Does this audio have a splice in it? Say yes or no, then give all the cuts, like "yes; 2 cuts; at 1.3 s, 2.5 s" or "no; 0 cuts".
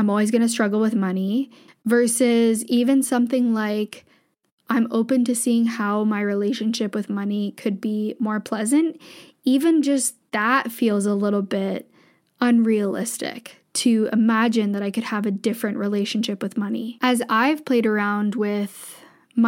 yes; 1 cut; at 1.7 s